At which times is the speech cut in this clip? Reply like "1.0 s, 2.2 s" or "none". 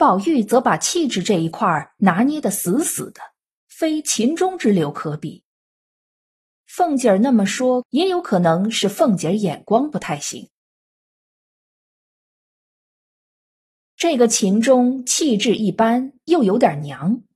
7.8 s